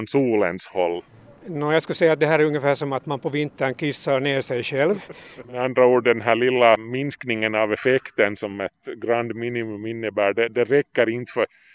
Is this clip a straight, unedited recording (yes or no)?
no